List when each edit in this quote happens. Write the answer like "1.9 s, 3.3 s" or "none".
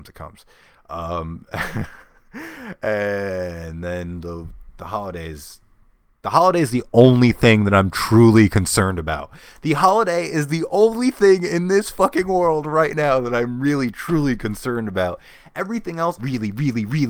16.2 s

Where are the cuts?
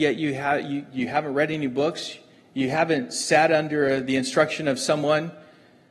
none

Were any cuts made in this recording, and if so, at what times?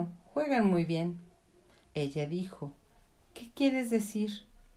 1.8 s

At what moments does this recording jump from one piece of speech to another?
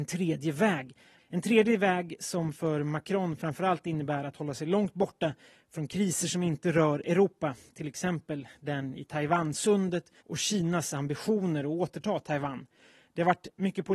1.2 s, 10.2 s

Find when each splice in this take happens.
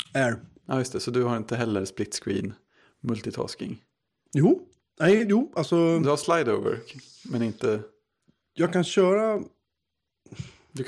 none

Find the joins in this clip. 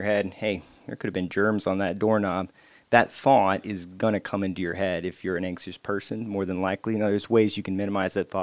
none

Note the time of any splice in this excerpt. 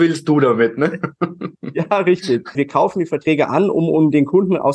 2.5 s

